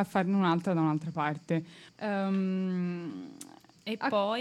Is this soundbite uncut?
no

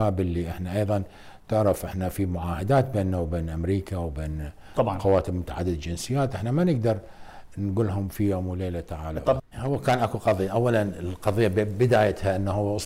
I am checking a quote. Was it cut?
yes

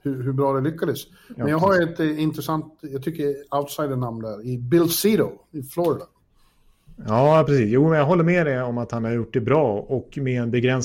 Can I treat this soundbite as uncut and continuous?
yes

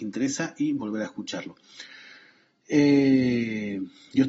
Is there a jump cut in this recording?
no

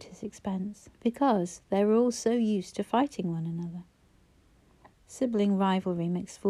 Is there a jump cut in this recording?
yes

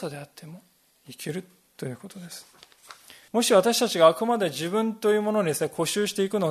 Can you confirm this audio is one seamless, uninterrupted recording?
no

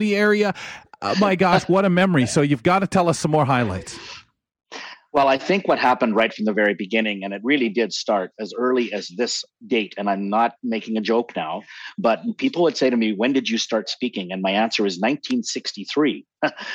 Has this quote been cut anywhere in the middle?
no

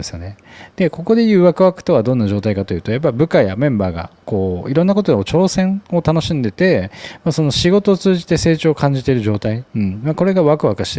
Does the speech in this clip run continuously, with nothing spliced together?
no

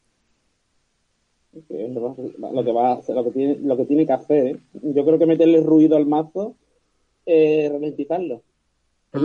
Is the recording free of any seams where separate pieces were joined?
yes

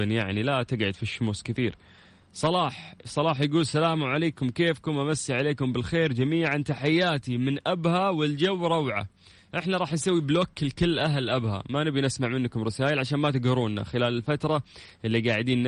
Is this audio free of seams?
yes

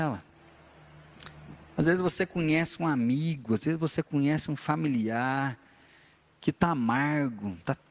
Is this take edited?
no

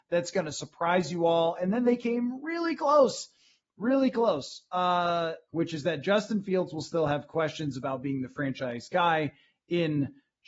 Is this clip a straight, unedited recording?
no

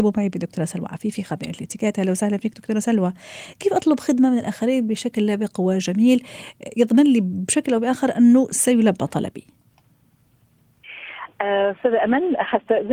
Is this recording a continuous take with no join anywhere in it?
yes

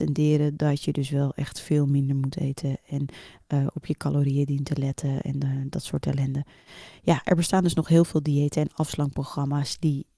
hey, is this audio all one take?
yes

